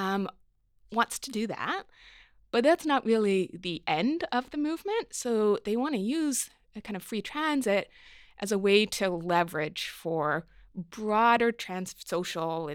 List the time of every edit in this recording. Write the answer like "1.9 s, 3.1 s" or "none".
none